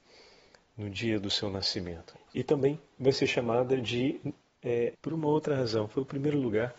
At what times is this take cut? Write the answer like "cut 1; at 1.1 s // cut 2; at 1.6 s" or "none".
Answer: cut 1; at 2.1 s // cut 2; at 4.9 s